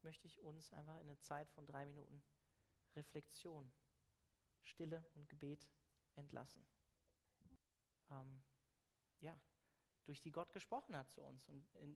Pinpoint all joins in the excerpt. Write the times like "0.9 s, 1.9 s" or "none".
8.0 s